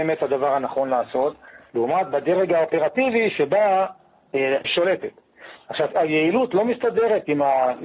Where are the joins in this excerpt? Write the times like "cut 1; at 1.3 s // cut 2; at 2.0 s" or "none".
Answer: cut 1; at 1.7 s // cut 2; at 4.6 s // cut 3; at 5.9 s